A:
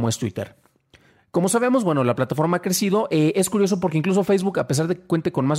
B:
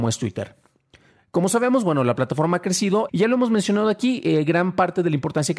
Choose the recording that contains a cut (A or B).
B